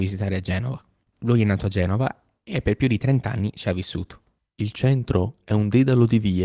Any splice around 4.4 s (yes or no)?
yes